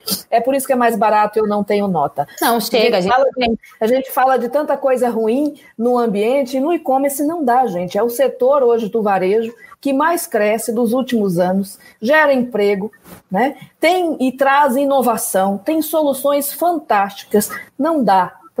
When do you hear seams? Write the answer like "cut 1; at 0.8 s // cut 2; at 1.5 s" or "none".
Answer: cut 1; at 2.3 s